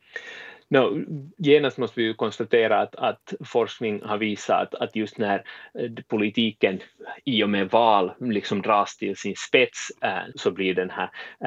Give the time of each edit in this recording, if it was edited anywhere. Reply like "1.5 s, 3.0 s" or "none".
10.3 s